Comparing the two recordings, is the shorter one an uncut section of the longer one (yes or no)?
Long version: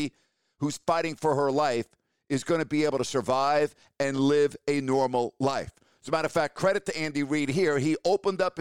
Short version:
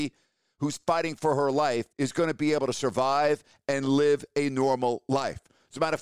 no